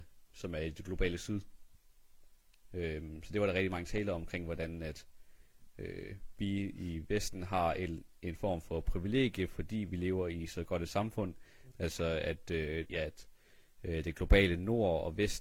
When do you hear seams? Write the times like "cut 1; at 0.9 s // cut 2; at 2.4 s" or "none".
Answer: cut 1; at 11.7 s // cut 2; at 12.9 s